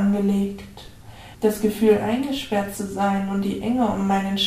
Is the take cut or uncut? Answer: cut